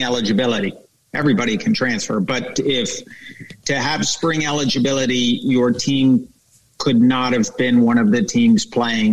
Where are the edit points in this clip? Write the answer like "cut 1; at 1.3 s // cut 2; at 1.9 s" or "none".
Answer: none